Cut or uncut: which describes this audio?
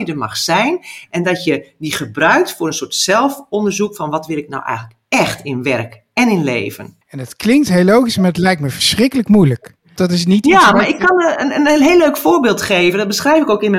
cut